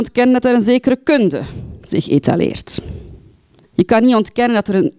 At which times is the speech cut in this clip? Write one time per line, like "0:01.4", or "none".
0:03.6